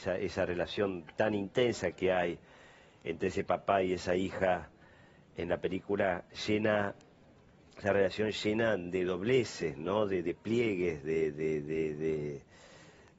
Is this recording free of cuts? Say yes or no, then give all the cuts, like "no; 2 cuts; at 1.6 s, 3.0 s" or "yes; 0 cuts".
yes; 0 cuts